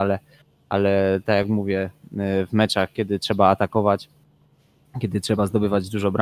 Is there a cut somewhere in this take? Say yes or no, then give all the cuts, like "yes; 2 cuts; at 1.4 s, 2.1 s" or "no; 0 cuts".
no; 0 cuts